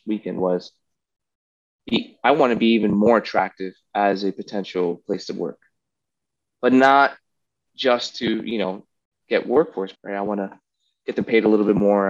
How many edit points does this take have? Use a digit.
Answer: 1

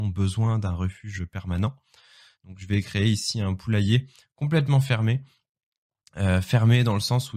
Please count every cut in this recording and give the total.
1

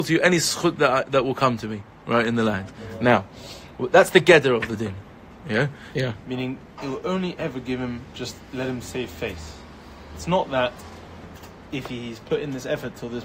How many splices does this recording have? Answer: 1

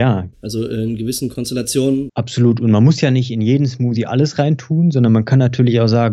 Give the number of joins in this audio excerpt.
1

